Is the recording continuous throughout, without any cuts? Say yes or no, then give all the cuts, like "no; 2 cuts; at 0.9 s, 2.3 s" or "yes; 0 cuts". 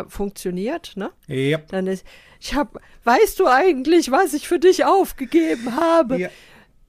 yes; 0 cuts